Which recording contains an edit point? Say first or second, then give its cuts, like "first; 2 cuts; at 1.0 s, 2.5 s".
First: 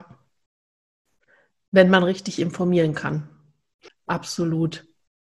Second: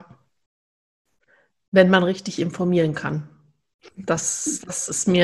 first; 1 cut; at 3.9 s